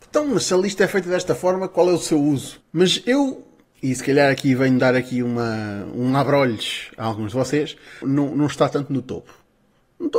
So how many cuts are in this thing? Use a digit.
2